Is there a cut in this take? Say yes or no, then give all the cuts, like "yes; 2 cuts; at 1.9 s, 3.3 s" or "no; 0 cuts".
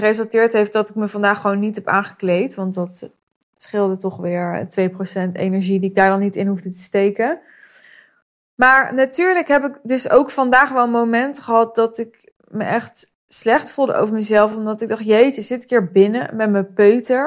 no; 0 cuts